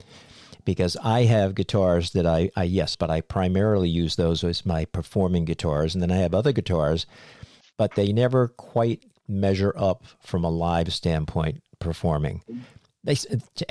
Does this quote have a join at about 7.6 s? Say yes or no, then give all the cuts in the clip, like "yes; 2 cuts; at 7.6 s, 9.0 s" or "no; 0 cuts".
yes; 2 cuts; at 2.9 s, 7.6 s